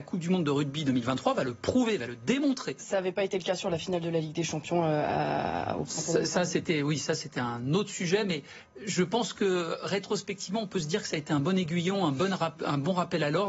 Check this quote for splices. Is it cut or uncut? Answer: uncut